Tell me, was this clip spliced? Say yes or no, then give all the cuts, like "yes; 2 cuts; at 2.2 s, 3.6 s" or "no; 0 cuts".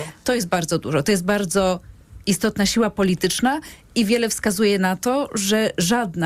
no; 0 cuts